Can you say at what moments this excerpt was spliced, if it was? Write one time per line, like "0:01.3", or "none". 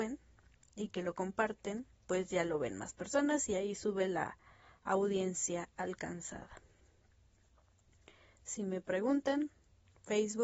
0:01.9

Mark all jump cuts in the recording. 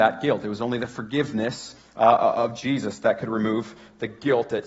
none

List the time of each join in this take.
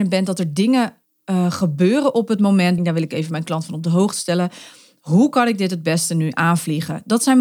0:02.8

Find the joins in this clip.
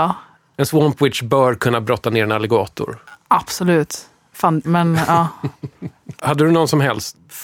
0:04.6
0:06.2

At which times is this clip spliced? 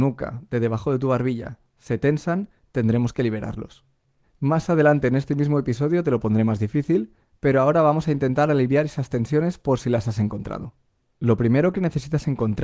0:04.2

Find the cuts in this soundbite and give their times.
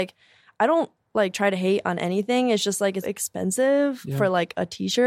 0:03.0

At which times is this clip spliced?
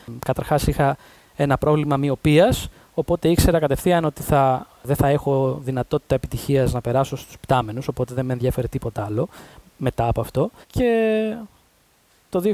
0:10.6

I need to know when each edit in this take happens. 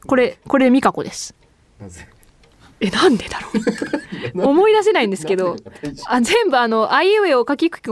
none

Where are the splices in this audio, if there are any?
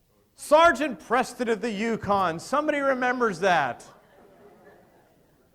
none

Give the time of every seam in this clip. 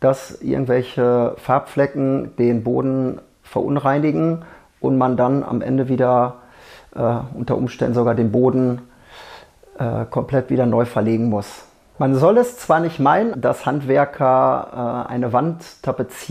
0:11.9
0:13.3

